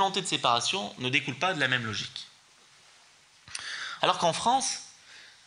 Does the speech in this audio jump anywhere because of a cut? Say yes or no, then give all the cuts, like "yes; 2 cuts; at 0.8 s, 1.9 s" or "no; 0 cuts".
yes; 1 cut; at 4.0 s